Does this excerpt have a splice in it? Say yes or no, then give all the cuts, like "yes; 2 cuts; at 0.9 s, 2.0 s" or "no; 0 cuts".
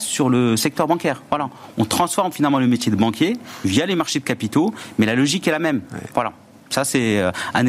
no; 0 cuts